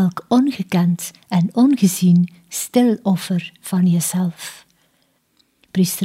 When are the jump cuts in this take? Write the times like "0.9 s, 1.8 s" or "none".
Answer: none